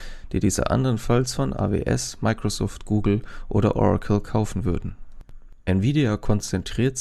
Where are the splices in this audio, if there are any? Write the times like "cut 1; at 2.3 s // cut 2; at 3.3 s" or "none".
none